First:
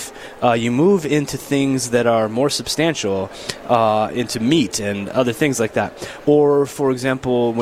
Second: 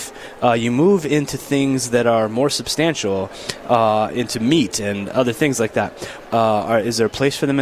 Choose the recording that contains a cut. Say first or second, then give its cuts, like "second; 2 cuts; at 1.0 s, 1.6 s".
second; 1 cut; at 6.2 s